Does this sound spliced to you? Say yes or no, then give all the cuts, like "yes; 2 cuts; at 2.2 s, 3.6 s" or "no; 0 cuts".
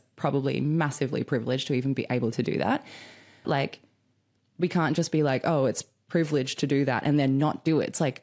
yes; 1 cut; at 3.4 s